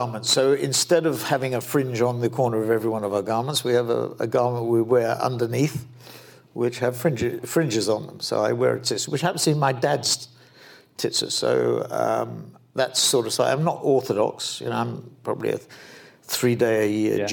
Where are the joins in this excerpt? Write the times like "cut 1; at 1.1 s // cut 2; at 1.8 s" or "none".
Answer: none